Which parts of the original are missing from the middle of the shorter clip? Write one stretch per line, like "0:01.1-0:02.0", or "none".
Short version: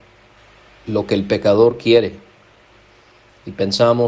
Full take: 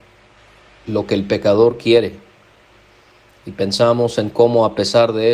none